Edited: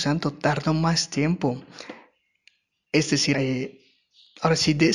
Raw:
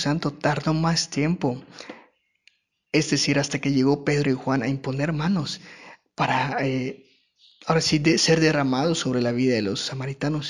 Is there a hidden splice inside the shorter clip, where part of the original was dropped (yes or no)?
yes